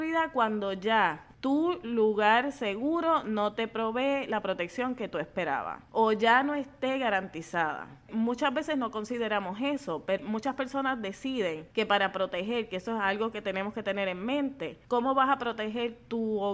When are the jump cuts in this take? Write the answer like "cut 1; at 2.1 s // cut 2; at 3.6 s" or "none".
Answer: cut 1; at 8.1 s // cut 2; at 10.2 s